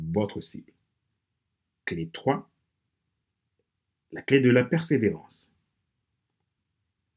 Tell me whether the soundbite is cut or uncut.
uncut